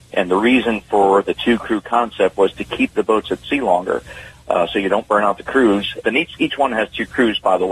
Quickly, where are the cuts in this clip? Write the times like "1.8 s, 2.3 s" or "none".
6.0 s